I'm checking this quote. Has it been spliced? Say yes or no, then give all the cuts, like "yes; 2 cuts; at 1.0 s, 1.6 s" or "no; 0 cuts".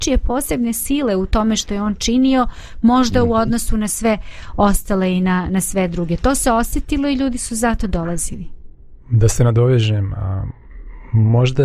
no; 0 cuts